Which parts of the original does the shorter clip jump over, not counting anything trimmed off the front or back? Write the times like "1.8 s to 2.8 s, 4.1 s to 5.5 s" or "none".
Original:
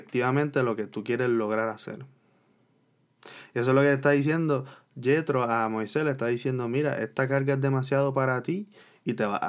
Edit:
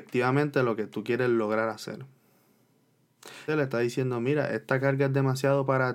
3.5 s to 6.0 s